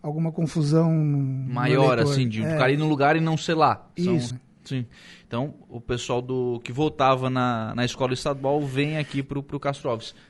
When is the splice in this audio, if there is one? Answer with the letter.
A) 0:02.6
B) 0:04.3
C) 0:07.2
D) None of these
B